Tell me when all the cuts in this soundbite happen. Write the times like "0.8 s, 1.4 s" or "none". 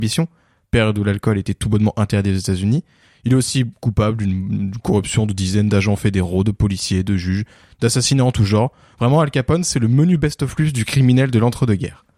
none